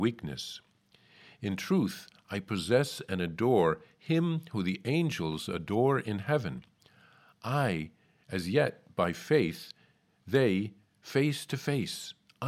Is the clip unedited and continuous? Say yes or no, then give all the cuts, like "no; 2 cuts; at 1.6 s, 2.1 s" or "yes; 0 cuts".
yes; 0 cuts